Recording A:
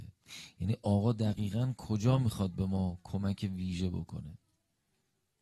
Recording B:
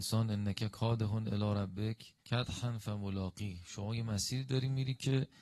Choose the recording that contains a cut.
B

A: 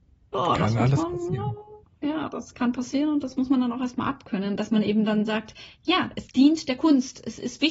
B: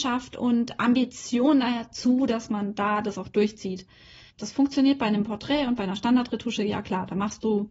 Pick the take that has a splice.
B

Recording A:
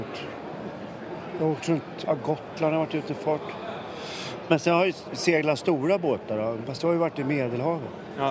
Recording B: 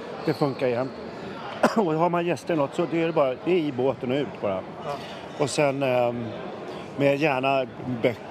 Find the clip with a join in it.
A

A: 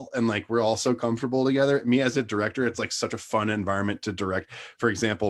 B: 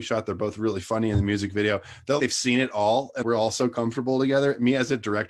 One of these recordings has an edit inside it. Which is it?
B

